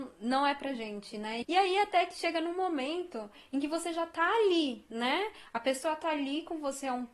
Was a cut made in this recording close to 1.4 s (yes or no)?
yes